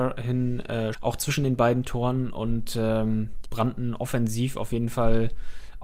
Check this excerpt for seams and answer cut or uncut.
cut